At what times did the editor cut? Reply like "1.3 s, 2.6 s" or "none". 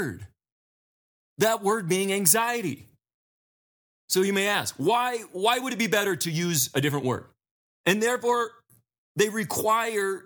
7.7 s